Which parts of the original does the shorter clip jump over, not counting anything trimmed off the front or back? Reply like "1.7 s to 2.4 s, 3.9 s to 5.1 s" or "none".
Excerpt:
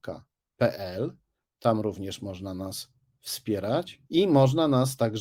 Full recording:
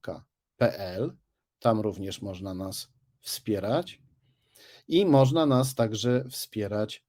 4.1 s to 4.8 s